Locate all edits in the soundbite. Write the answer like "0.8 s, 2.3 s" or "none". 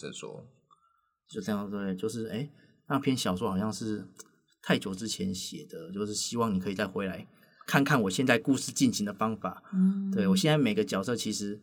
none